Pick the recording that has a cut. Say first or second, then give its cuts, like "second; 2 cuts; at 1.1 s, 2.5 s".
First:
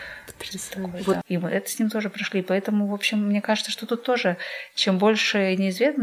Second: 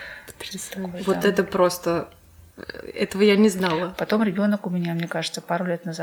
first; 1 cut; at 1.2 s